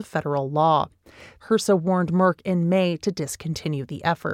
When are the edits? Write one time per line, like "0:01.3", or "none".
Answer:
0:01.4